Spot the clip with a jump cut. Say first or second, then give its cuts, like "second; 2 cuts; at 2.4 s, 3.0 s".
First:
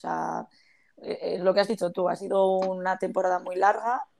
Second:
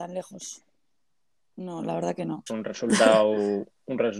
second; 1 cut; at 2.5 s